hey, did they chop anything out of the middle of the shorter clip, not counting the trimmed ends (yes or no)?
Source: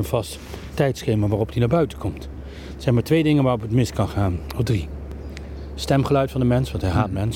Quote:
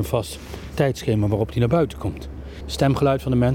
yes